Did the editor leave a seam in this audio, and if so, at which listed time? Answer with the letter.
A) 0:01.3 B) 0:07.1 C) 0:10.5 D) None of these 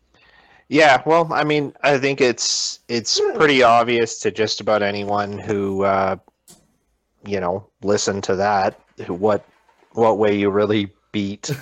D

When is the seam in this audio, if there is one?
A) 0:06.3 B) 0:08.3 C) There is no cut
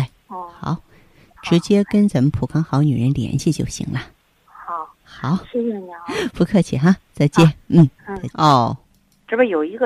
B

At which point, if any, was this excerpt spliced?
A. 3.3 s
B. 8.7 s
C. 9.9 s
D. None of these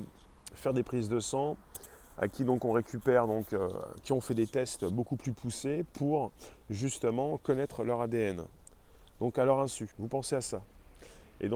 C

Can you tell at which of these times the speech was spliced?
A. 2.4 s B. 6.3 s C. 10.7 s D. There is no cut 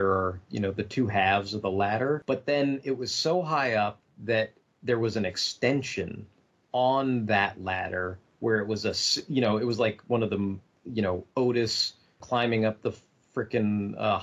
D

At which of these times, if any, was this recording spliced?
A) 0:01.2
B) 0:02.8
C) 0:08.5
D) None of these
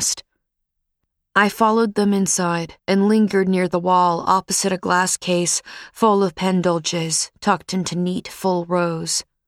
B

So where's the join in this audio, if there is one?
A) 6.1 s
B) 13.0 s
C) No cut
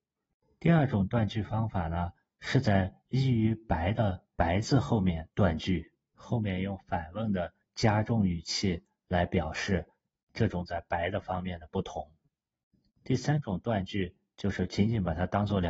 A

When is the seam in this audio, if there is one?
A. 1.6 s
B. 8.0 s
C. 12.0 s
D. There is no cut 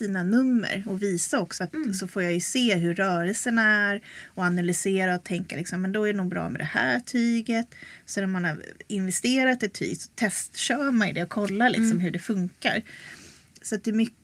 A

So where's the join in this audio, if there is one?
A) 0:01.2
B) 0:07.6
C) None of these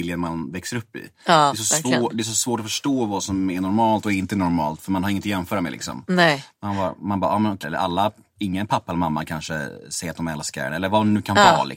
B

